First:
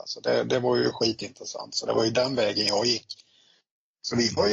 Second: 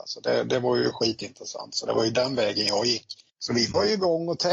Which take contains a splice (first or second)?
second